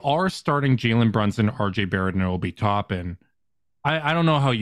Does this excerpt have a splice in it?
no; 0 cuts

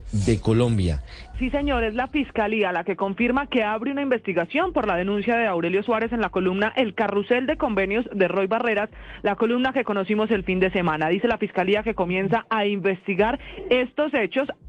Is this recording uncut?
no; 1 cut; at 1.3 s

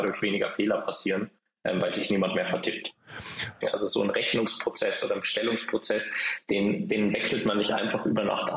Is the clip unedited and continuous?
no; 1 cut; at 3.6 s

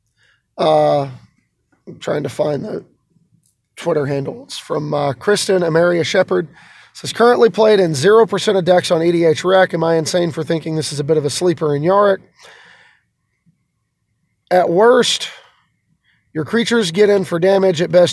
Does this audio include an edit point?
no; 0 cuts

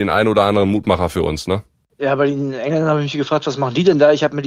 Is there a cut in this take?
no; 0 cuts

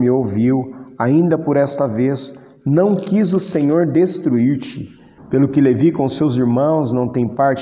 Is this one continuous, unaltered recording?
no; 1 cut; at 5.2 s

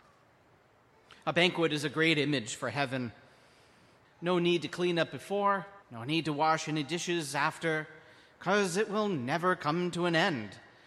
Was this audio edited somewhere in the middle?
yes; 2 cuts; at 4.0 s, 5.8 s

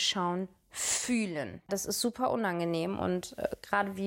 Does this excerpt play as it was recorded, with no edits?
no; 1 cut; at 1.7 s

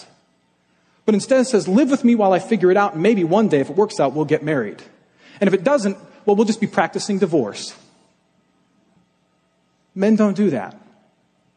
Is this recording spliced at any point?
no; 0 cuts

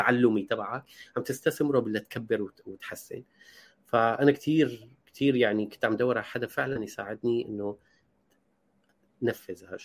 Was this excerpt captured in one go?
yes; 0 cuts

